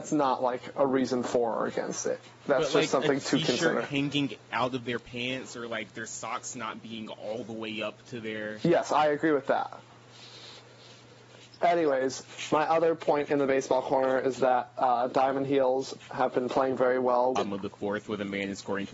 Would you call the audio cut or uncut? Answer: cut